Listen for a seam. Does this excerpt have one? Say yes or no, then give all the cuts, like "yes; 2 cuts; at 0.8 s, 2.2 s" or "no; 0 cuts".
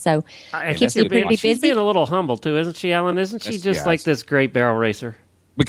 no; 0 cuts